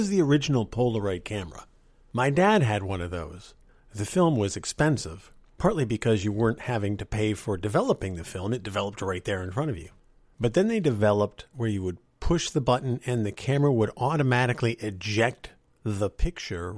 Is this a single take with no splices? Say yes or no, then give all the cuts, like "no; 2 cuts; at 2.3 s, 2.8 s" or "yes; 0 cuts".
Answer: no; 1 cut; at 11.5 s